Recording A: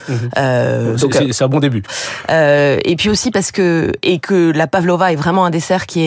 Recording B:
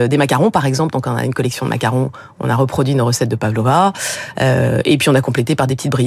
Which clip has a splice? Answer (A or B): A